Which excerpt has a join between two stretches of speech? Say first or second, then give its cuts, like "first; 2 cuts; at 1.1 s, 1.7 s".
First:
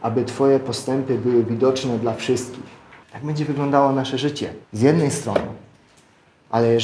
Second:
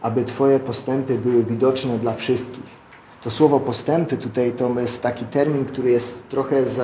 first; 2 cuts; at 3.0 s, 4.6 s